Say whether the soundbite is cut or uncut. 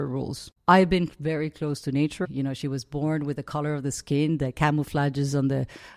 cut